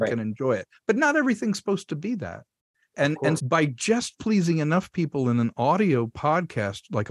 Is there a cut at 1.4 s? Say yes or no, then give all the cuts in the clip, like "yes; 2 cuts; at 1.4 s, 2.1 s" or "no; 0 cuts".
no; 1 cut; at 3.4 s